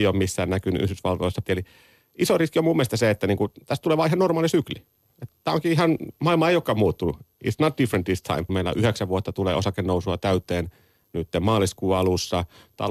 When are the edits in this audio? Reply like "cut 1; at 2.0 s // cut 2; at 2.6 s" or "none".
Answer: cut 1; at 1.5 s // cut 2; at 8.5 s